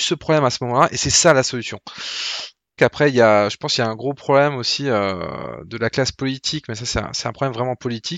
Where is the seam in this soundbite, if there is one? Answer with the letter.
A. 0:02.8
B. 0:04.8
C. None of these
A